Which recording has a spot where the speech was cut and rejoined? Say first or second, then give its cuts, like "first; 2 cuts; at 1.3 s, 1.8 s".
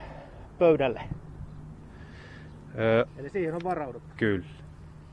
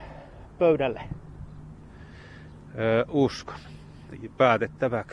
first; 1 cut; at 3.1 s